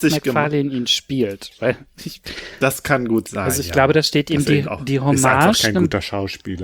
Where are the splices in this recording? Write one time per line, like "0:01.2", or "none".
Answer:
none